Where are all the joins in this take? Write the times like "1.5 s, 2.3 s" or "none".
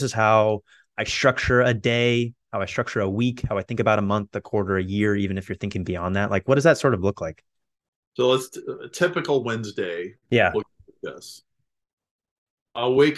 none